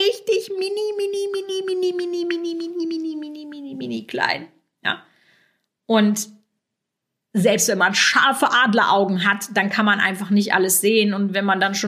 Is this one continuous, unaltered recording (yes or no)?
yes